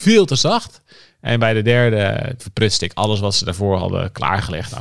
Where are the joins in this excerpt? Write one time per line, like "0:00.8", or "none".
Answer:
0:02.4